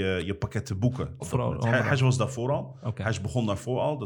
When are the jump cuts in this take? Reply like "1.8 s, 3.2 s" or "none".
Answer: 1.2 s